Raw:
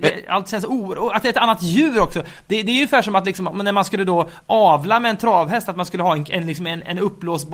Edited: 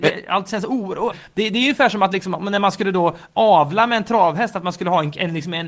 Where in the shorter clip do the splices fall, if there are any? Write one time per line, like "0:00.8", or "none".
0:01.1